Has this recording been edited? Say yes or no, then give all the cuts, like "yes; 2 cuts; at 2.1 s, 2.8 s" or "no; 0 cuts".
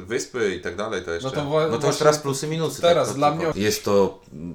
yes; 1 cut; at 3.5 s